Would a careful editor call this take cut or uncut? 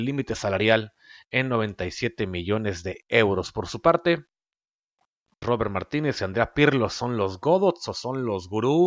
cut